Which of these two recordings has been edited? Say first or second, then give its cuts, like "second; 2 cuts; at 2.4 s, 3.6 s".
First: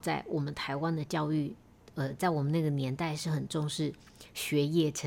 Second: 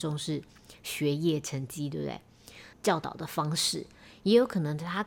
second; 1 cut; at 2.7 s